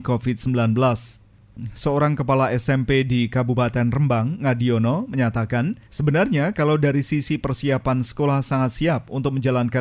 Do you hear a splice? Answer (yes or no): no